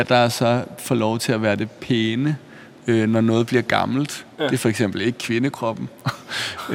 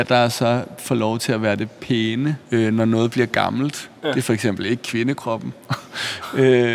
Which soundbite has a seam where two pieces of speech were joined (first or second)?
second